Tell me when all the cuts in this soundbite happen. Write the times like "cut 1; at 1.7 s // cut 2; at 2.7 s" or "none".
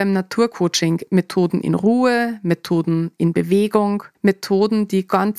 cut 1; at 4.1 s